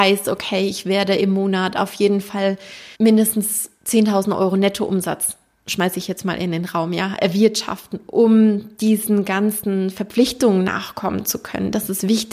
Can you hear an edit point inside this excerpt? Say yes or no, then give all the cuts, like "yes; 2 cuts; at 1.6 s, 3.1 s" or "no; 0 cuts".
yes; 1 cut; at 2.9 s